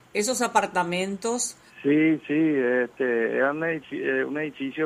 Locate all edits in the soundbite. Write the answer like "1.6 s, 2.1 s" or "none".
1.7 s